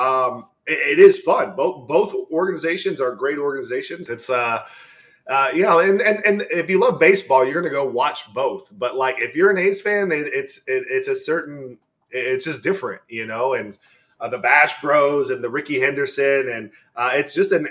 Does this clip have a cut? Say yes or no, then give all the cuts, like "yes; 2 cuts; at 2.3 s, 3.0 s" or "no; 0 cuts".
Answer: yes; 1 cut; at 4.1 s